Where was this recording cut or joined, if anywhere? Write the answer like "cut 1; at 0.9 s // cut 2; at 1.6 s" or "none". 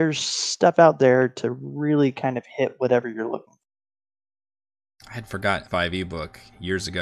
cut 1; at 5.6 s